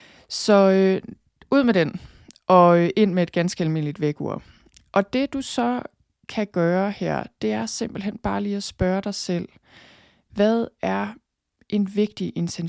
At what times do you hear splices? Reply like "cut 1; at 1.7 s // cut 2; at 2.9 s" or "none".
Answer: none